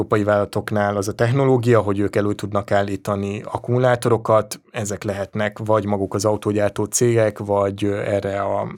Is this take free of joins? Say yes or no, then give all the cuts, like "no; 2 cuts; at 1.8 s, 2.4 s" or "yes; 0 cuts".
yes; 0 cuts